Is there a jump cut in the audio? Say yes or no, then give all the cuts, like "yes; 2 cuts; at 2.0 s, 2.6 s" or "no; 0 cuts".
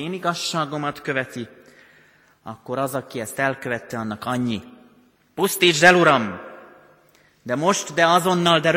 no; 0 cuts